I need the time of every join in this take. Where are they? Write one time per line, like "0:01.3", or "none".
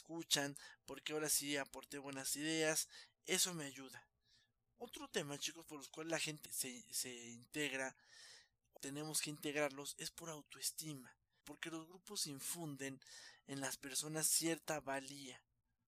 0:06.5
0:08.8
0:11.4